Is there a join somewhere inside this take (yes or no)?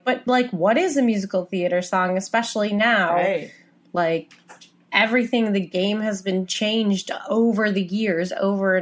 no